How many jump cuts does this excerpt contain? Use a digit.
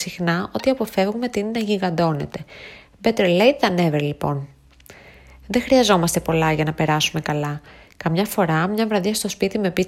0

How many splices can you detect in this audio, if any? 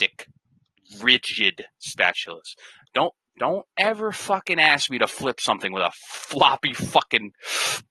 0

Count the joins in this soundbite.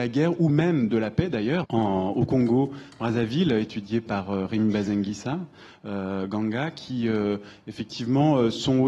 1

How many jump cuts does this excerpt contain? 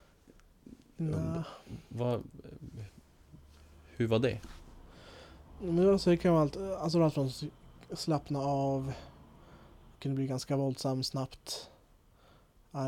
1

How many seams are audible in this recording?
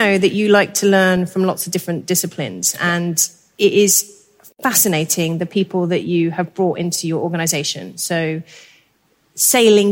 0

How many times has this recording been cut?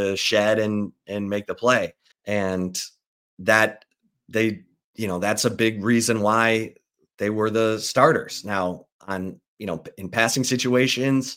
1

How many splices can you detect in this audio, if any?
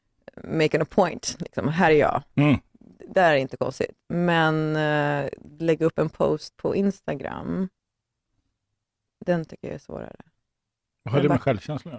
0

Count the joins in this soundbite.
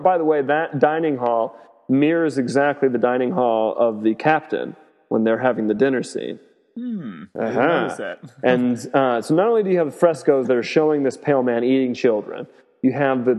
0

